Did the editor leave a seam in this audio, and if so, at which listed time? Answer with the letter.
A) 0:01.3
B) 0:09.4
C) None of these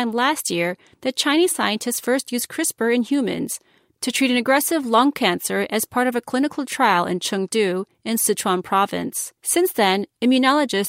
B